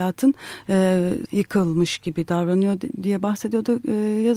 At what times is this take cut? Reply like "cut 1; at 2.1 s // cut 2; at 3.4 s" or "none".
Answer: cut 1; at 1.3 s